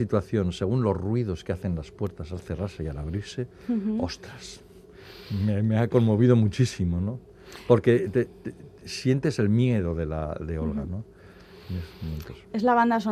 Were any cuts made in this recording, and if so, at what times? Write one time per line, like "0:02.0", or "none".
none